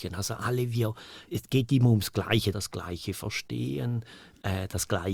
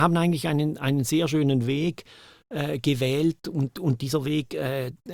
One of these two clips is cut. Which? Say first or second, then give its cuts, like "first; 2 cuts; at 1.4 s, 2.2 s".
first; 2 cuts; at 1.3 s, 2.5 s